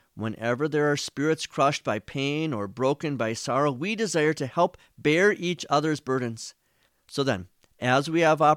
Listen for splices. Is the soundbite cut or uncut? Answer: cut